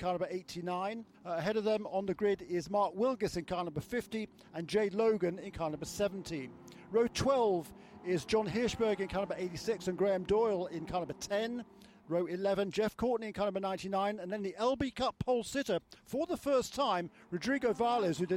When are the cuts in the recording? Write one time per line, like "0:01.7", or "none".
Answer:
0:01.1